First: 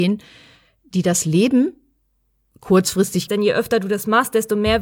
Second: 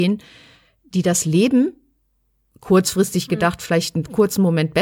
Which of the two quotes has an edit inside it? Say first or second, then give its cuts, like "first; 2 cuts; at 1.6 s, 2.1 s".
first; 1 cut; at 3.3 s